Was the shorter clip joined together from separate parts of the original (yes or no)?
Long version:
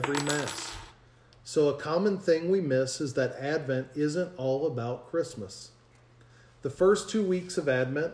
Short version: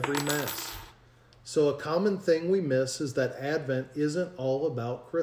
no